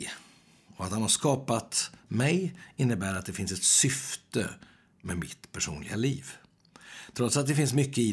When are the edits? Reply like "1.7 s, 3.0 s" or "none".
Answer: 7.1 s